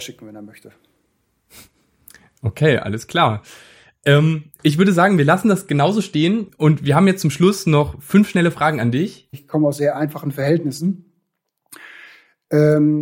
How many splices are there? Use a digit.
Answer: 1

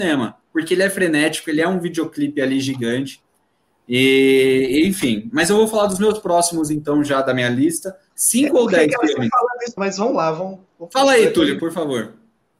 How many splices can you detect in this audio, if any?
2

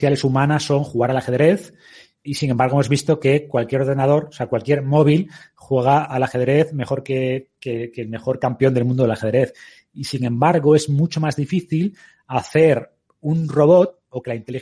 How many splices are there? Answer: 1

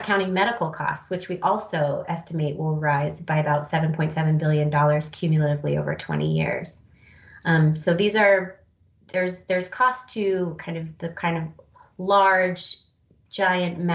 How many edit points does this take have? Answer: 0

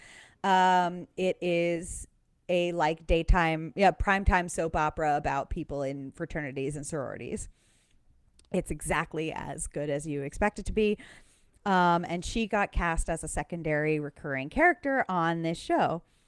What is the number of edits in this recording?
0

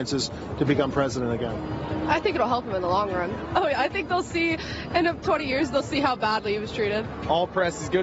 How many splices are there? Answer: 1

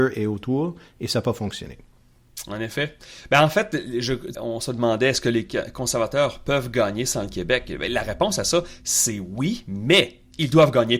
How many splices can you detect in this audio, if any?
1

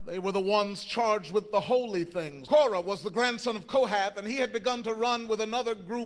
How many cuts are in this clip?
1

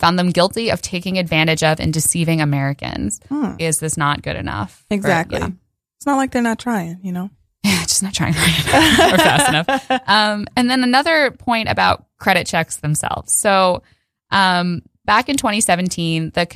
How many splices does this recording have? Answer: 1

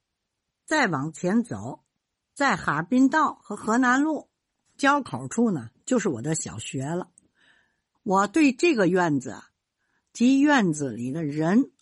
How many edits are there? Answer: 1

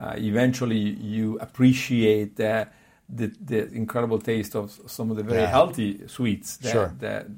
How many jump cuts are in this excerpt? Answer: 1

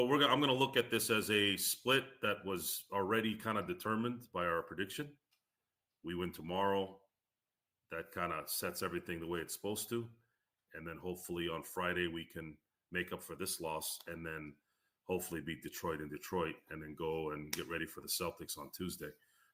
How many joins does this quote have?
0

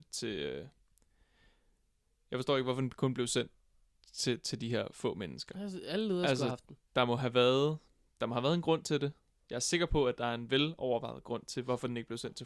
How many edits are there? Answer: 0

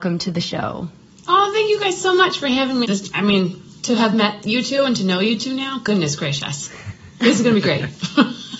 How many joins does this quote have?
1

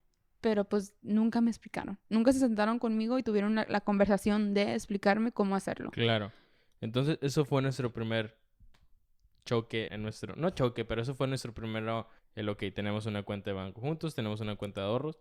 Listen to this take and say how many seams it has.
2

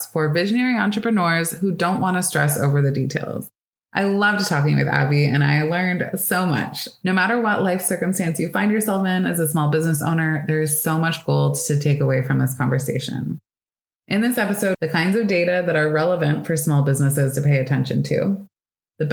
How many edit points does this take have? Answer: 2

